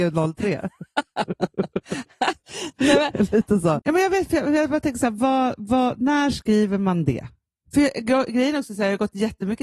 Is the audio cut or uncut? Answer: cut